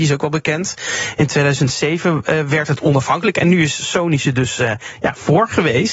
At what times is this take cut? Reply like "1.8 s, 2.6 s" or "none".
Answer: none